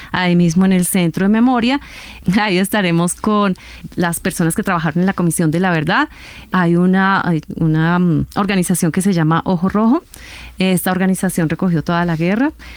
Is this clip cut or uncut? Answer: uncut